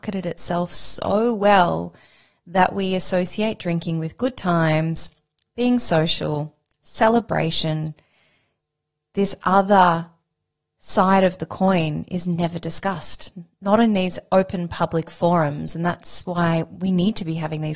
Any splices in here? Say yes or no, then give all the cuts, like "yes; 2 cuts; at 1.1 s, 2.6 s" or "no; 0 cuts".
no; 0 cuts